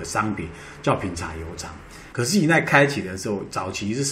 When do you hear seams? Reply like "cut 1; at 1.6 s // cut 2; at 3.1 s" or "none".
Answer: cut 1; at 2.1 s